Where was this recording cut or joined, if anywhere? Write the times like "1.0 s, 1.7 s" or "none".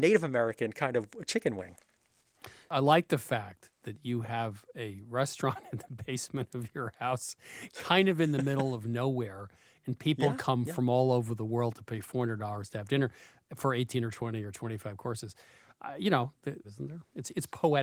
16.6 s